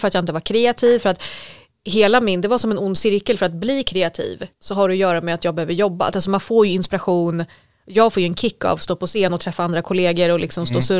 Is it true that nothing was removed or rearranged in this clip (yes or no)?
no